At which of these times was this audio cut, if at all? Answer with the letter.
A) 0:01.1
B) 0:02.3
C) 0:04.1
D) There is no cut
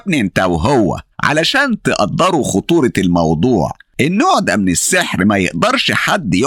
A